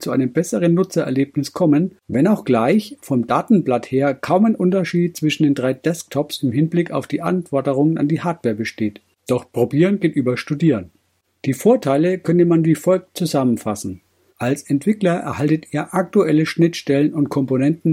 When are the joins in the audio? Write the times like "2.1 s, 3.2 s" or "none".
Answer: 14.3 s